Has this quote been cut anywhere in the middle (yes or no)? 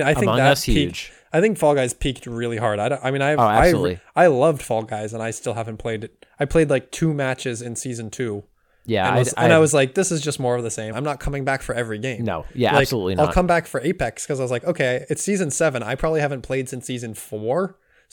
yes